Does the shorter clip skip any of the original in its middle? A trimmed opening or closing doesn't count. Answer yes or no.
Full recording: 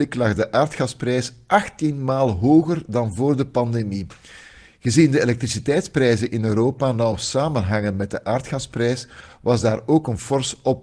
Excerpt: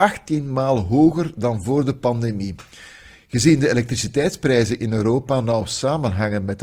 no